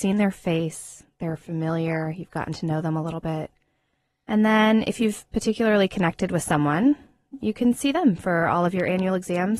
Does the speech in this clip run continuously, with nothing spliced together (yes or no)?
yes